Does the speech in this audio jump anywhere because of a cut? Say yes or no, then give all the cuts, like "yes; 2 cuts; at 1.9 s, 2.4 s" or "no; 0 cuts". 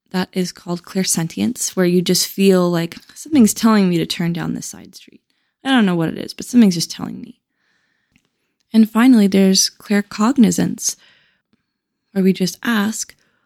yes; 1 cut; at 3.0 s